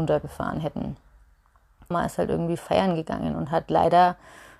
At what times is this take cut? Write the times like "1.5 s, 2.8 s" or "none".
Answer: 1.9 s